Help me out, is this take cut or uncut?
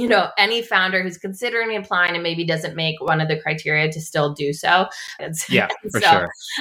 cut